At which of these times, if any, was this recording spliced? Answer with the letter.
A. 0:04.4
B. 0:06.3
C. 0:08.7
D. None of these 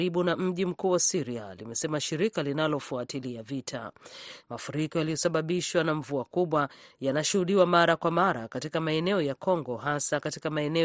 A